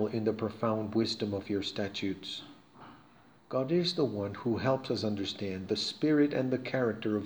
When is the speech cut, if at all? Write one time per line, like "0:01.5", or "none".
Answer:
0:03.4